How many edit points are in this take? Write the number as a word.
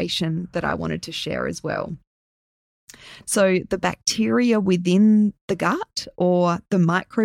one